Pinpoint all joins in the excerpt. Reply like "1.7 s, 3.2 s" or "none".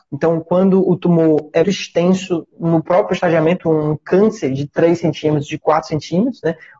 1.6 s

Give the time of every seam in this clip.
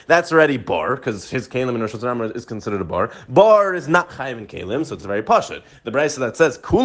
none

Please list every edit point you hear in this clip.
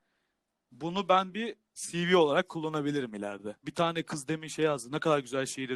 3.6 s

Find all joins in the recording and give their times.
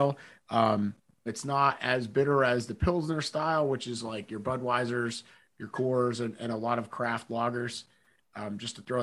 1.3 s

